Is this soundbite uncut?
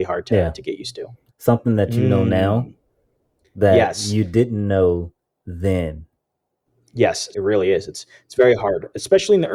no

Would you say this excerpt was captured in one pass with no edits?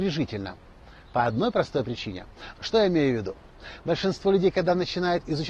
no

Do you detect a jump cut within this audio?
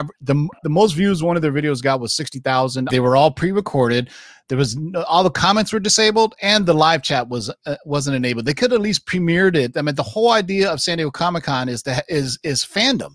yes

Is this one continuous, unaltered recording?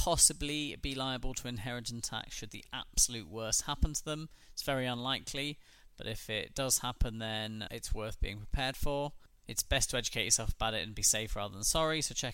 yes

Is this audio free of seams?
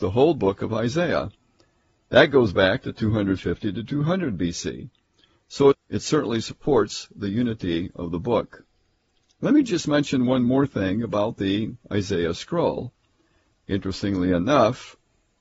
no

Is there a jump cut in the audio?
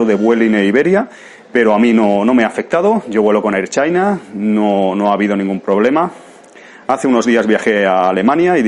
no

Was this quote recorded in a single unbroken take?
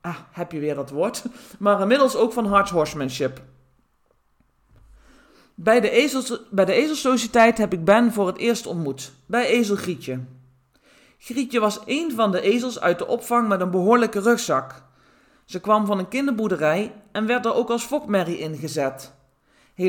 yes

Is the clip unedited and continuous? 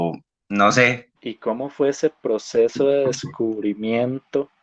no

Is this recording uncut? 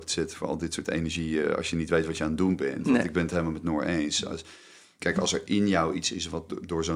no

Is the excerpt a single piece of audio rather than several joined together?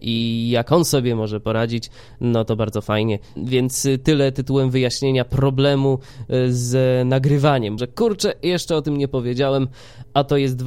no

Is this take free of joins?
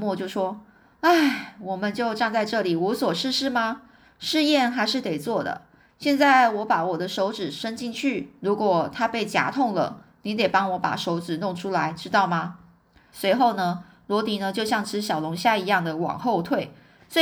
no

